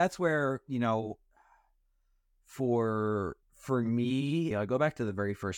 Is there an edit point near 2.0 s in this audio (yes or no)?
no